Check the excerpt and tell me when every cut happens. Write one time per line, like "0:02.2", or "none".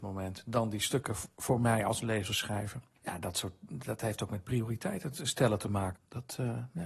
0:03.0
0:06.0